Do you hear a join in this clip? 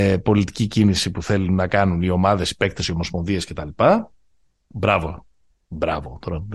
no; 0 cuts

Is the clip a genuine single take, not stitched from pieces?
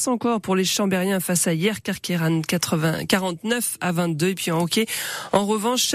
yes; 0 cuts

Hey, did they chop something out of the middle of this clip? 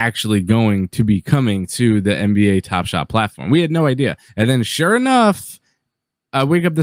yes; 1 cut; at 4.3 s

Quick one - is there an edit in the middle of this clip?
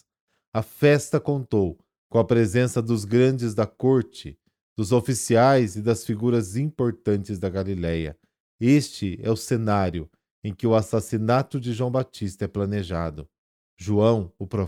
no; 0 cuts

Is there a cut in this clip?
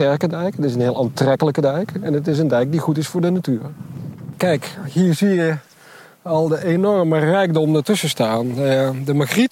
no; 0 cuts

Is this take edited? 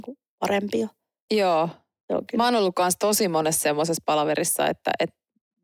yes; 1 cut; at 1.3 s

